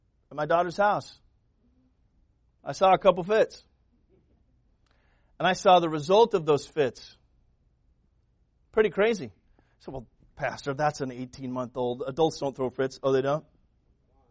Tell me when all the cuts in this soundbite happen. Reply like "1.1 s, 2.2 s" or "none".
none